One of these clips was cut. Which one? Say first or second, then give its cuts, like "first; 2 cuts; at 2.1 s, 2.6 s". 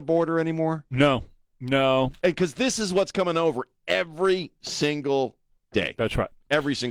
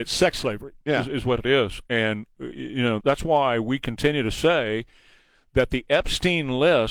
second; 1 cut; at 3.0 s